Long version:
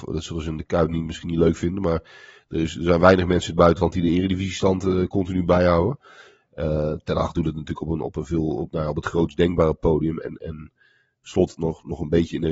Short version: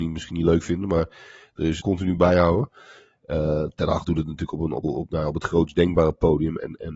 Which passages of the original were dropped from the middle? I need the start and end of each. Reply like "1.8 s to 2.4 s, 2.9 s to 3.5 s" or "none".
2.7 s to 5.1 s, 8.1 s to 8.5 s